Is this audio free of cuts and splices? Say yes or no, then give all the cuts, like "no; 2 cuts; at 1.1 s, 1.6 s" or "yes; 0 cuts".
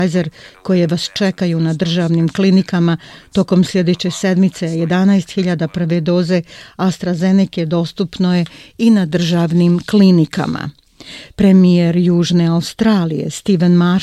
yes; 0 cuts